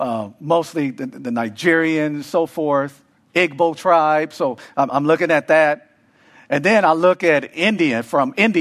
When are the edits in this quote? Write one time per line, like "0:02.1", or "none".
0:04.9

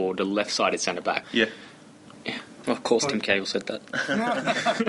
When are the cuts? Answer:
0:01.2
0:02.6

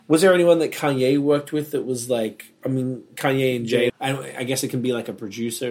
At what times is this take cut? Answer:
0:03.9

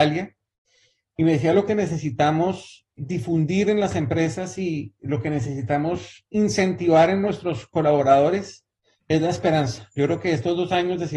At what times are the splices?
0:01.7
0:03.0

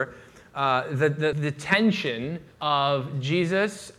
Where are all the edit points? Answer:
0:01.3
0:02.5

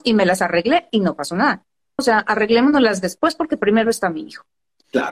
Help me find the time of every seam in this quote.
0:02.0

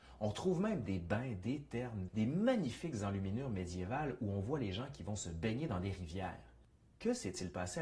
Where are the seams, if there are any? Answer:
0:02.1

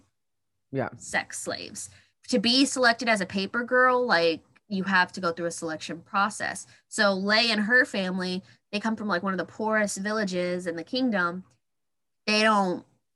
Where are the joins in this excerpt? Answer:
0:02.1

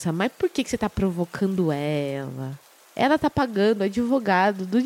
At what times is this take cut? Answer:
none

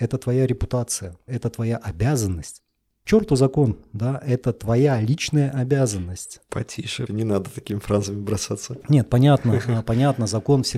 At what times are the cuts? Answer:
0:07.1

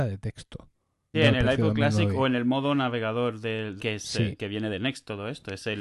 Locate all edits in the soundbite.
0:01.1
0:03.8

